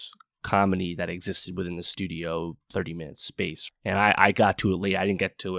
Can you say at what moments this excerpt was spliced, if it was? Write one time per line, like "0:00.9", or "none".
none